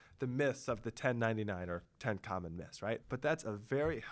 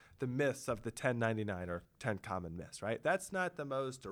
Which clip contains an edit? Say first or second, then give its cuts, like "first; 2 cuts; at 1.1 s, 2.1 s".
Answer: first; 1 cut; at 3.0 s